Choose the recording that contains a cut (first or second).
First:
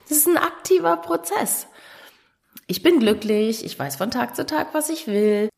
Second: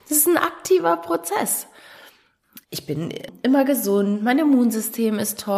second